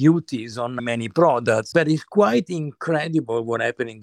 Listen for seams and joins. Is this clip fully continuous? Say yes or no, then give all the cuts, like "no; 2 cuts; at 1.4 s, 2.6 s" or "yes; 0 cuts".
no; 1 cut; at 1.7 s